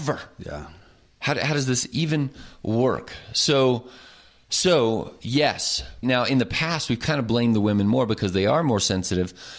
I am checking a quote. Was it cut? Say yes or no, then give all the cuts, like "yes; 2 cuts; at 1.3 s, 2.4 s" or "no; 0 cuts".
yes; 1 cut; at 6.0 s